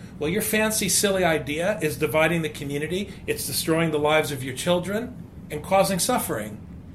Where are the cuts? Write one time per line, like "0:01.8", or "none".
none